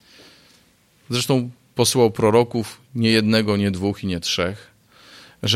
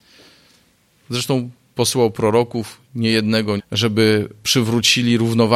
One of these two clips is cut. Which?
second; 1 cut; at 3.6 s

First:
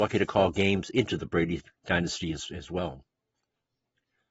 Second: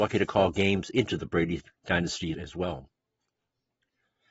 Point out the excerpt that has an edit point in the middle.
second; 1 cut; at 2.3 s

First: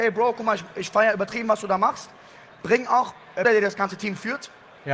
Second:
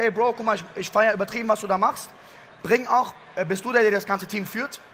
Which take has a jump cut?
first; 1 cut; at 3.4 s

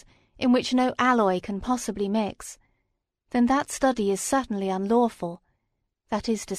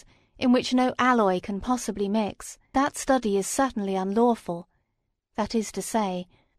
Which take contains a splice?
second; 1 cut; at 2.7 s

